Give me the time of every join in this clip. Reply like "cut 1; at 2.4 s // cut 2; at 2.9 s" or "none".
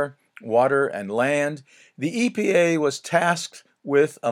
none